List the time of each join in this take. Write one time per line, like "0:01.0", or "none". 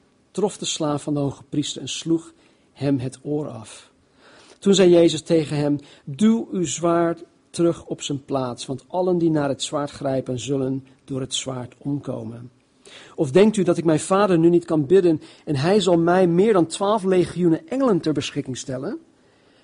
none